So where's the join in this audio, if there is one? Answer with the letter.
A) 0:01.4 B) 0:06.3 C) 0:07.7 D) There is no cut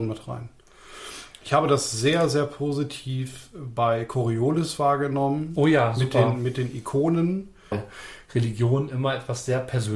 C